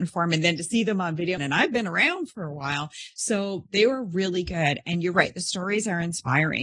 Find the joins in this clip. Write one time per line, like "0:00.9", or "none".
0:01.4